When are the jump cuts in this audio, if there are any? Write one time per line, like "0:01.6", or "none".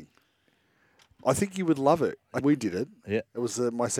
0:02.4